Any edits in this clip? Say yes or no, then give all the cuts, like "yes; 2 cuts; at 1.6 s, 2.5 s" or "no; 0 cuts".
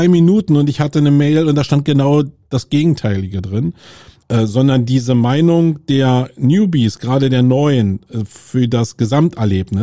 yes; 1 cut; at 4.2 s